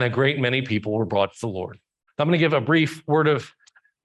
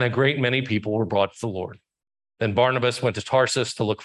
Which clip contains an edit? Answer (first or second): first